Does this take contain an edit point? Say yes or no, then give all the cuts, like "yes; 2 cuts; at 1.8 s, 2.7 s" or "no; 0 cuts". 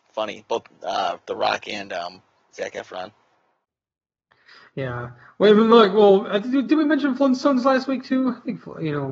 no; 0 cuts